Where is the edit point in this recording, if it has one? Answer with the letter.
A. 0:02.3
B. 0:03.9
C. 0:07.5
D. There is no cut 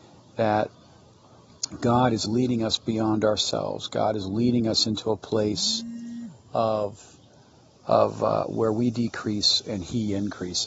A